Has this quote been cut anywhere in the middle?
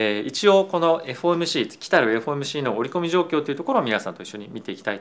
no; 0 cuts

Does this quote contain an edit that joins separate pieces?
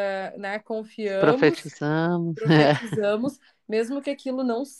no; 0 cuts

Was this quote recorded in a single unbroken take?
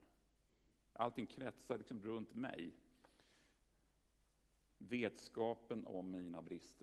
no; 1 cut; at 4.7 s

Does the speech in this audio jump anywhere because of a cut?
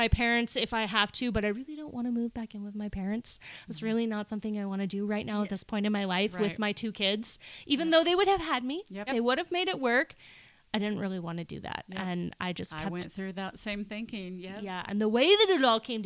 yes; 2 cuts; at 9.1 s, 14.9 s

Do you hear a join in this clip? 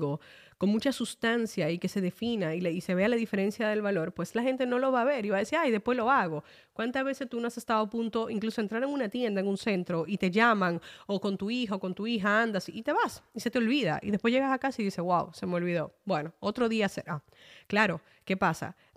no; 0 cuts

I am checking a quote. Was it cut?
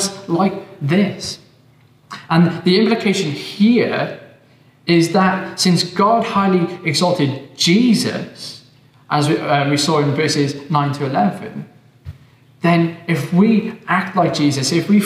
no; 0 cuts

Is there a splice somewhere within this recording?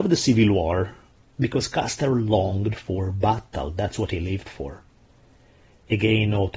yes; 1 cut; at 1.3 s

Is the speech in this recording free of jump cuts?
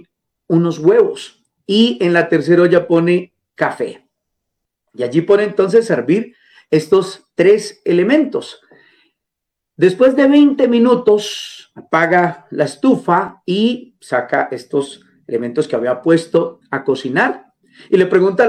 yes; 0 cuts

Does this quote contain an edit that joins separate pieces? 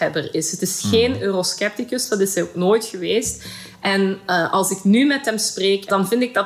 no; 0 cuts

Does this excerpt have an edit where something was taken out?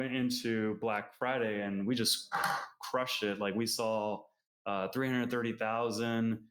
no; 0 cuts

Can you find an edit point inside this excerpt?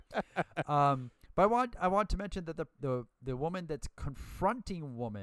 yes; 1 cut; at 2.8 s

